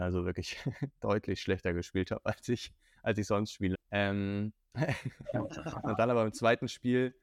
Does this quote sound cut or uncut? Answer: cut